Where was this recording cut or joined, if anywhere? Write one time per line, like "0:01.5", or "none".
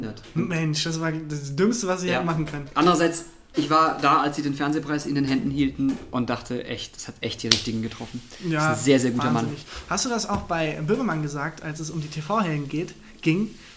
none